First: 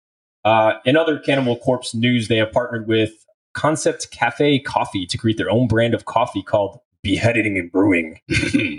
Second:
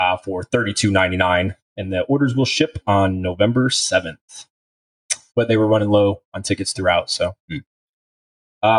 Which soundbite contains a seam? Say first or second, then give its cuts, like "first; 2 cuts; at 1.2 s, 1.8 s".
second; 1 cut; at 5.3 s